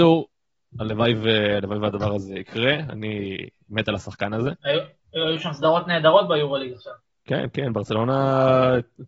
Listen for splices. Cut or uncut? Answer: uncut